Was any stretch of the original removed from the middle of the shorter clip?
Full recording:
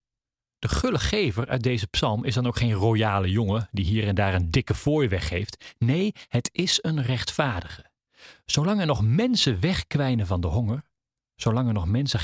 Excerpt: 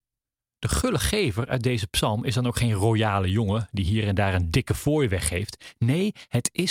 no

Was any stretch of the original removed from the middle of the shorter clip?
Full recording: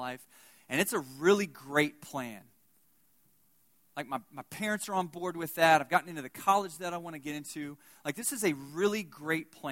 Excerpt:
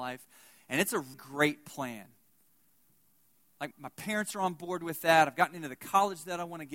yes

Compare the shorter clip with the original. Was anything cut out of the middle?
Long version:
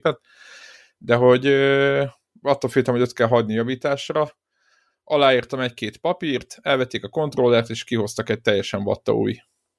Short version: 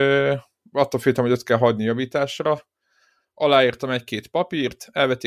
no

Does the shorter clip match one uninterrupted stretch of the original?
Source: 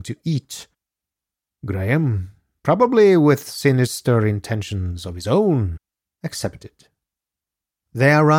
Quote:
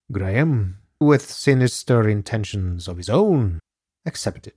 no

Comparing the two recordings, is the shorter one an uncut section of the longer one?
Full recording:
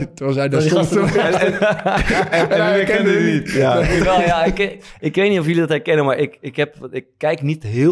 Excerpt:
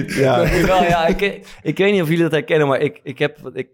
yes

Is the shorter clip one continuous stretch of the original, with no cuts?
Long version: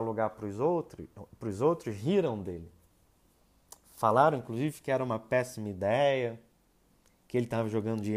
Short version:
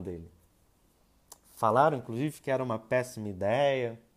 yes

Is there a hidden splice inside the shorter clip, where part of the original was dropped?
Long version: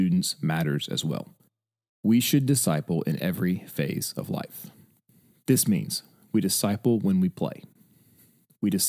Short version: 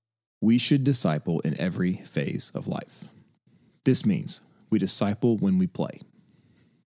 no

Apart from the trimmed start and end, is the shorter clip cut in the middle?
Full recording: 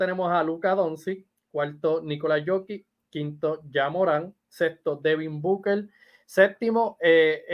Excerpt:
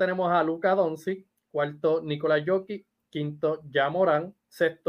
no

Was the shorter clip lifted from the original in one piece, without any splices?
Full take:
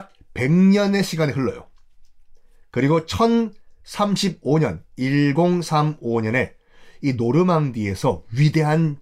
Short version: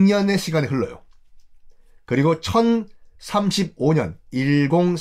yes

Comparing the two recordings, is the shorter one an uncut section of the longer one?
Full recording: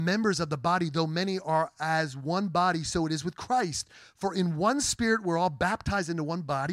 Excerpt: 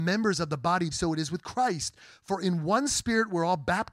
no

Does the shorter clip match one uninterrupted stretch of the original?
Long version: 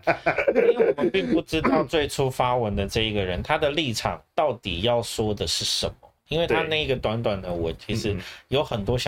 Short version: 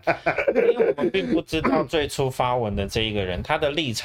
yes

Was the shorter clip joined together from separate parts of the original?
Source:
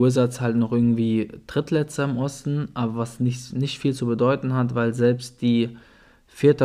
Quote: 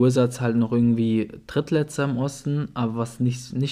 no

